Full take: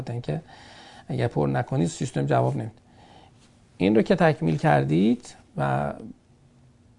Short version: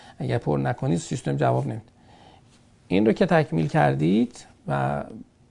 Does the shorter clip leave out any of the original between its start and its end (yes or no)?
no